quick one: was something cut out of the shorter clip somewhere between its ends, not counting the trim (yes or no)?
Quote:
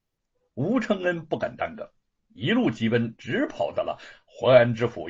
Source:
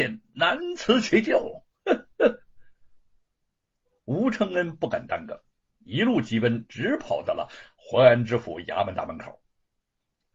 no